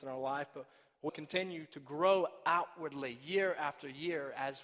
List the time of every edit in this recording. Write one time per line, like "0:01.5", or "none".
0:01.1